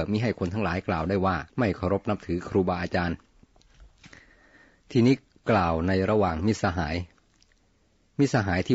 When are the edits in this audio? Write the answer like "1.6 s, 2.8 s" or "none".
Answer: 1.5 s